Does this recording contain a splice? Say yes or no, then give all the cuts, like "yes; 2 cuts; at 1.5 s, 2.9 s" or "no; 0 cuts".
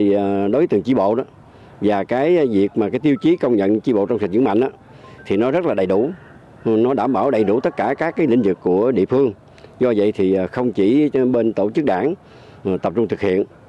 no; 0 cuts